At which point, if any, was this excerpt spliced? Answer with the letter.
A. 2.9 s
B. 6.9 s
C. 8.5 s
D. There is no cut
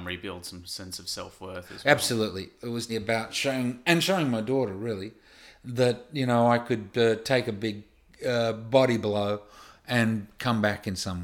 A